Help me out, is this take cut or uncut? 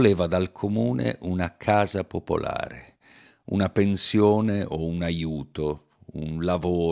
uncut